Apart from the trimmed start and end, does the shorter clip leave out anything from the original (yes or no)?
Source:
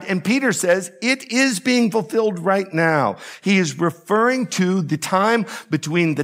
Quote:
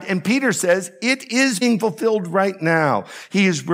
yes